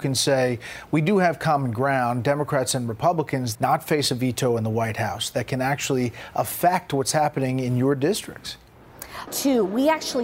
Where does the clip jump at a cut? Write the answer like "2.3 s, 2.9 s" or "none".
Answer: 3.6 s, 9.3 s